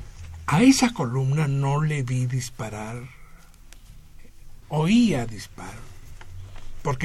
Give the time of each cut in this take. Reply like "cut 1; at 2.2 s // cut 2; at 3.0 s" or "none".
cut 1; at 4.6 s